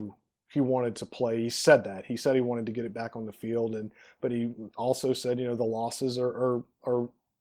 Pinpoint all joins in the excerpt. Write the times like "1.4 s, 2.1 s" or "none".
none